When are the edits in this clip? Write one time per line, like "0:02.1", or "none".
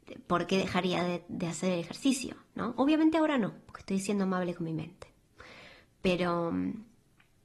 none